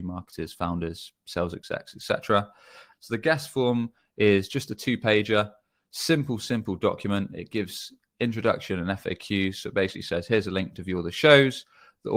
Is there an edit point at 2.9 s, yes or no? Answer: yes